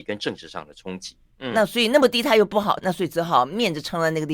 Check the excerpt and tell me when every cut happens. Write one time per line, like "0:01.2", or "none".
0:01.3
0:02.8